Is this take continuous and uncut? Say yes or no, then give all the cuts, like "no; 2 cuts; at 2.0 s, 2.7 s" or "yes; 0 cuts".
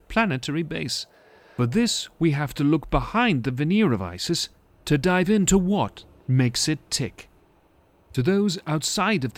yes; 0 cuts